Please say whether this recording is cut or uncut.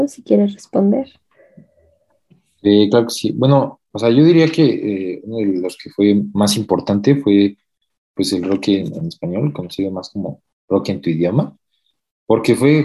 uncut